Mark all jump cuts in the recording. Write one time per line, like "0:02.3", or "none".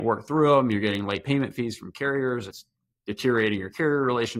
none